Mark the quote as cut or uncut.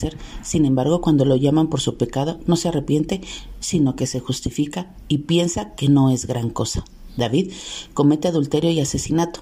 uncut